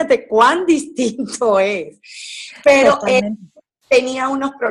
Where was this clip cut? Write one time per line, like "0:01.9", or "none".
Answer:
none